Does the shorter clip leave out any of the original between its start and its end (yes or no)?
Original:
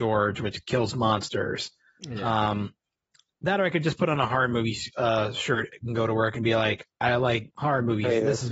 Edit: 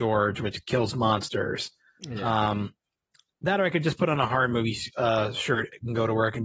no